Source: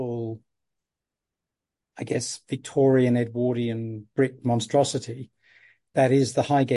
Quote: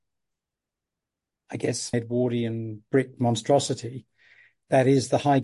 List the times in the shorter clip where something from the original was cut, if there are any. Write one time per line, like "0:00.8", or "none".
0:01.9